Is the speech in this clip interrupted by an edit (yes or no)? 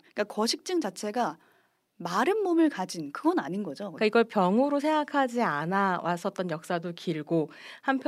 yes